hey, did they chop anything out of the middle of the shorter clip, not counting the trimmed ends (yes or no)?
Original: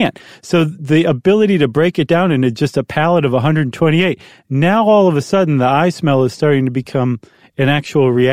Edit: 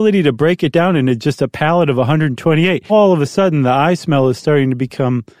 yes